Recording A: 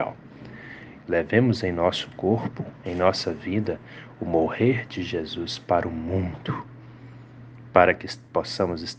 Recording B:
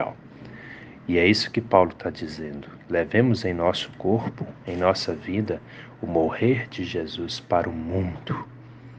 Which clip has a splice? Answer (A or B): A